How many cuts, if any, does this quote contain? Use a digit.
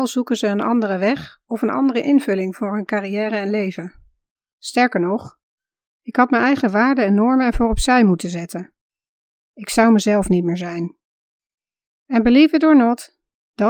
1